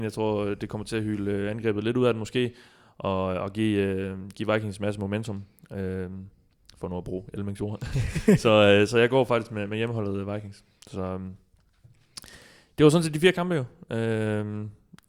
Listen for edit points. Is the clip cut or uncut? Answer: cut